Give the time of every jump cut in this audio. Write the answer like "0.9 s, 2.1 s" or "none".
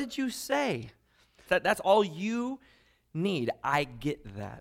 1.5 s

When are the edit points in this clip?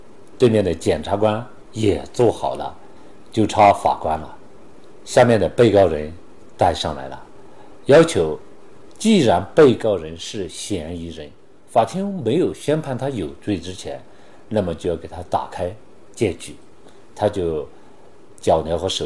none

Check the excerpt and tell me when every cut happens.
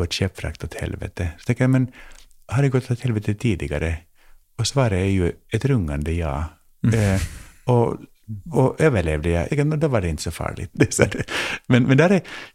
9.5 s, 10.7 s

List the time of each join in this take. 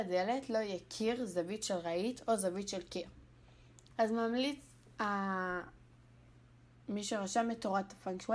3.9 s

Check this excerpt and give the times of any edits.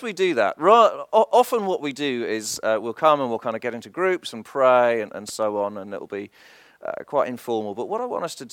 none

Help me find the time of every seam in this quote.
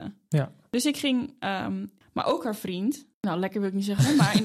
2.0 s, 3.1 s

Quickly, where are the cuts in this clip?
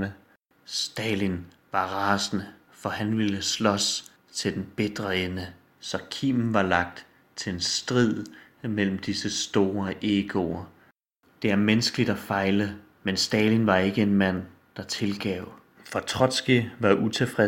15.7 s

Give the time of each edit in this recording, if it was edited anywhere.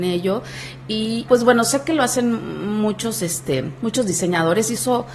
1.3 s

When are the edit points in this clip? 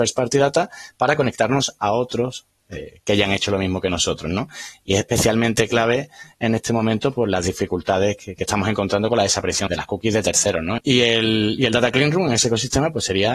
9.7 s, 10.8 s

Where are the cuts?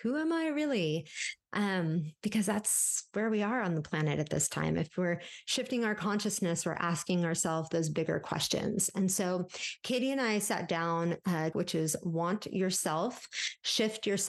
11.5 s

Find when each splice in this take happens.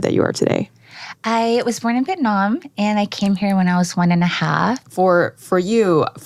4.8 s

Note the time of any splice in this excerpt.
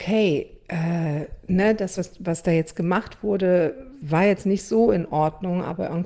none

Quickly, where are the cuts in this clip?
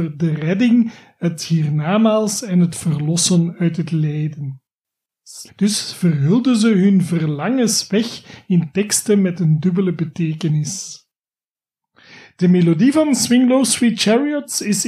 5.5 s

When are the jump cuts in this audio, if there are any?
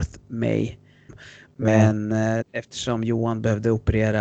1.1 s, 2.4 s

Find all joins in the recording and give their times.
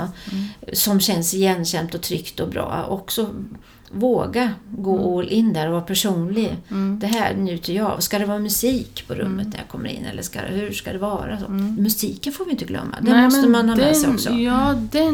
none

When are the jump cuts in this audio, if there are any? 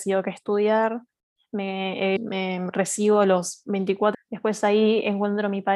2.2 s, 4.1 s

